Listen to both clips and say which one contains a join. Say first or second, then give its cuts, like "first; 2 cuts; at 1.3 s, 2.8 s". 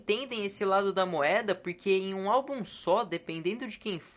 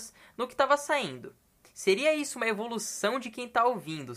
second; 1 cut; at 1.6 s